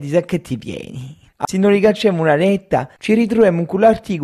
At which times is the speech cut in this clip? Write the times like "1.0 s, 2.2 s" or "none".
1.4 s

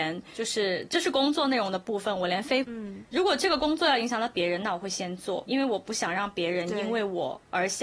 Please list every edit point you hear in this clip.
2.6 s, 5.5 s

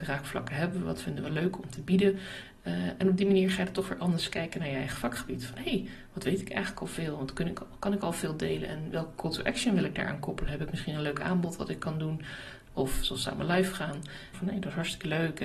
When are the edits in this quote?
12.7 s, 14.3 s

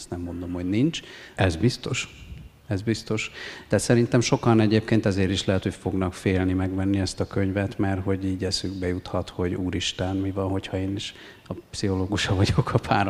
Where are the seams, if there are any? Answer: 1.4 s

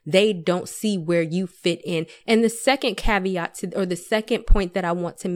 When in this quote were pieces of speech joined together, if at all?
2.2 s

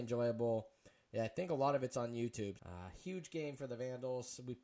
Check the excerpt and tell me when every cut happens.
2.6 s

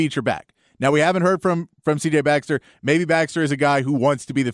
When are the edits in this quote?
none

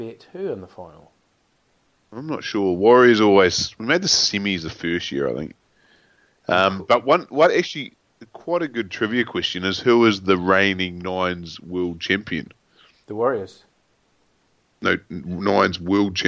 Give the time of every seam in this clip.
none

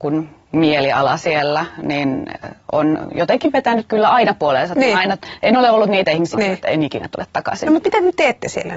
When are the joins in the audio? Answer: 6.3 s

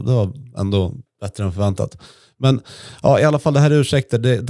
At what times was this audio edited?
none

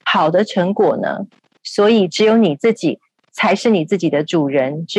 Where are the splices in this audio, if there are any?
1.6 s

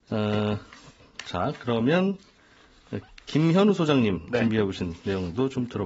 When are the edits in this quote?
none

